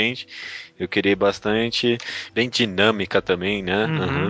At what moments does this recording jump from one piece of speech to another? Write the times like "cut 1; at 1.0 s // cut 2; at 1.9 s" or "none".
cut 1; at 2.3 s